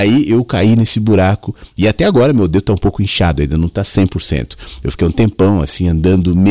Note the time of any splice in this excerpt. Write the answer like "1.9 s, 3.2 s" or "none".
none